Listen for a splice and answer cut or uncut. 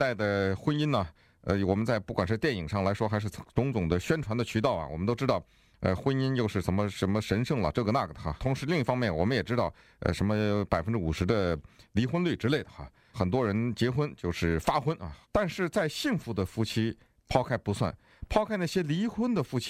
uncut